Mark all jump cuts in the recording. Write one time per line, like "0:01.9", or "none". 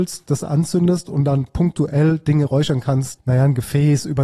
0:03.2